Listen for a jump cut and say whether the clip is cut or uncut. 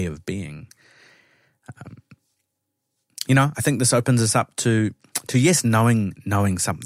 uncut